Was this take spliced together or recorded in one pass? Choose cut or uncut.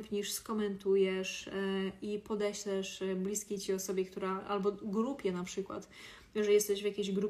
uncut